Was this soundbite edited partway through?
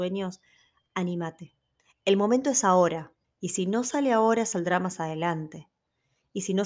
yes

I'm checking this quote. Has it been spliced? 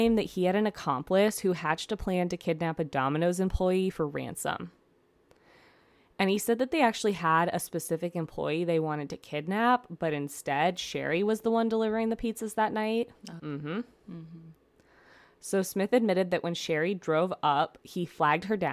yes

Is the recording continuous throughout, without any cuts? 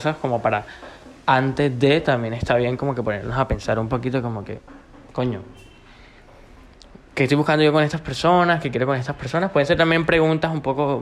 yes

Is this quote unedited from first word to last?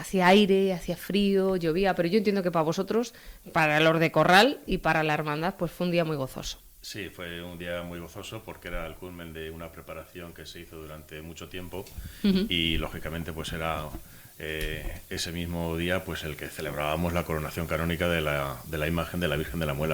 yes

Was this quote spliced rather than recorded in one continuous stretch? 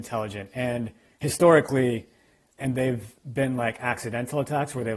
yes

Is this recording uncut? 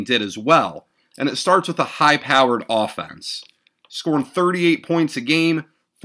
yes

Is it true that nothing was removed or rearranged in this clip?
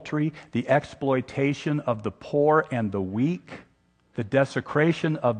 no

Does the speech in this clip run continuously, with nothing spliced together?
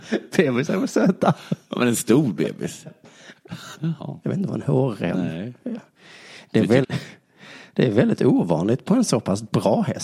no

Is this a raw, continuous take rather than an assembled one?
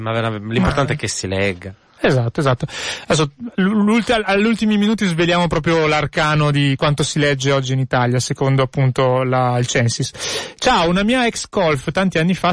yes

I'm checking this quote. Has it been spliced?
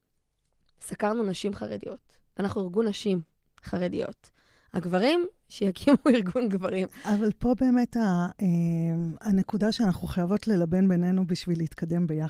no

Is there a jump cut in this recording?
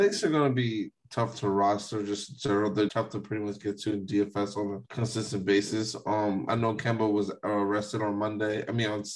yes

